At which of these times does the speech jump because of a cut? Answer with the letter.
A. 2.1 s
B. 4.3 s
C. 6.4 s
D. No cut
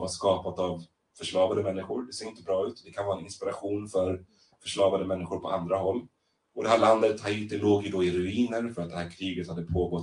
C